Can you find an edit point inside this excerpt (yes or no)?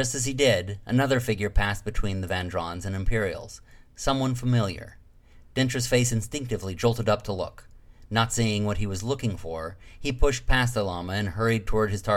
no